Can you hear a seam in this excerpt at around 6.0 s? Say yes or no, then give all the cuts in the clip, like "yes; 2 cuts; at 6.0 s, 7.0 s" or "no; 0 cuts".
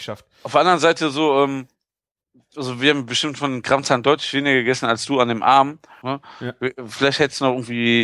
yes; 1 cut; at 6.0 s